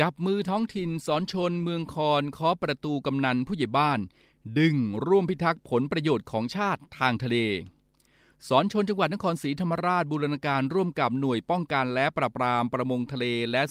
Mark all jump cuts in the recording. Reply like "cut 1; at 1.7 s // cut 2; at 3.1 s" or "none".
none